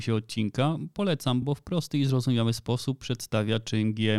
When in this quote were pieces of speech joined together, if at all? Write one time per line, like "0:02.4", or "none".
none